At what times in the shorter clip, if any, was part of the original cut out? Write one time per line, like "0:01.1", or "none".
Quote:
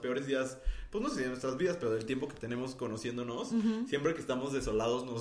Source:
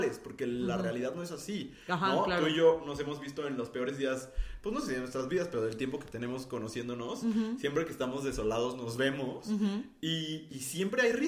none